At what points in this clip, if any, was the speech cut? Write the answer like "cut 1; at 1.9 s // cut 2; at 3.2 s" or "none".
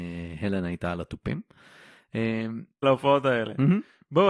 cut 1; at 2.8 s